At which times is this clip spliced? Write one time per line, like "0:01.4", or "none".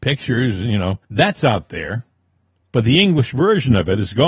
0:01.0
0:02.6